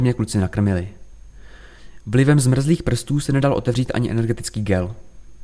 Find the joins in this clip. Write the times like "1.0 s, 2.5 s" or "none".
none